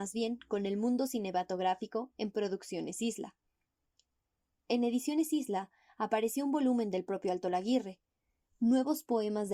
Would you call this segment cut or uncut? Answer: uncut